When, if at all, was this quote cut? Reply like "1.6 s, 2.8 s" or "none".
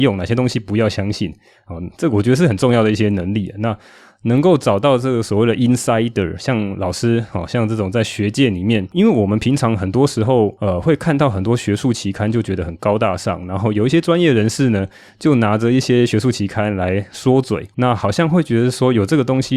none

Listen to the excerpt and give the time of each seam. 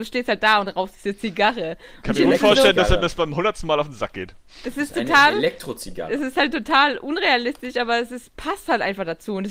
none

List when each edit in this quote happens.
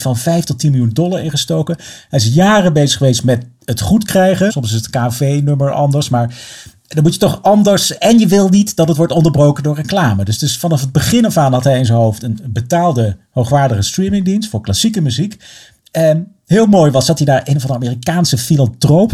4.5 s

